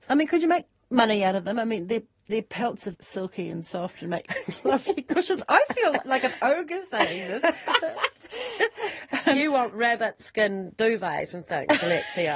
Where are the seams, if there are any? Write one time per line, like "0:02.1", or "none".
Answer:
0:02.9